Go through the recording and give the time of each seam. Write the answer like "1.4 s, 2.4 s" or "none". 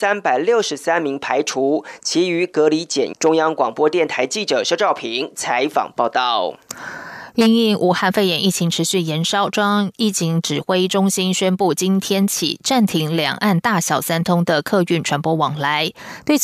3.1 s